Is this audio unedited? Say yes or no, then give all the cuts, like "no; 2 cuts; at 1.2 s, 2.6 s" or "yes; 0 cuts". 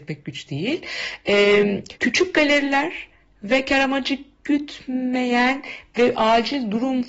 no; 1 cut; at 2.0 s